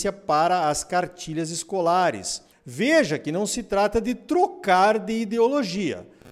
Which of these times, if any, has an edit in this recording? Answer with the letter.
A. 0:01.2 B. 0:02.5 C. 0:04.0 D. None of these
B